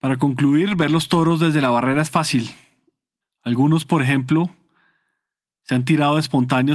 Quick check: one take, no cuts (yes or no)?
no